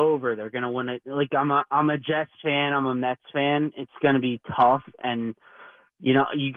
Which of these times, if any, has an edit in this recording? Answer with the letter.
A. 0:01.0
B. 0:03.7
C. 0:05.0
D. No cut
A